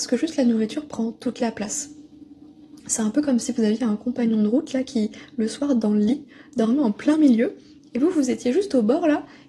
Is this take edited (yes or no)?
no